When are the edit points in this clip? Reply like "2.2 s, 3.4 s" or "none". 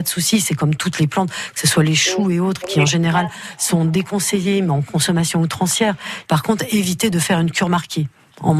6.2 s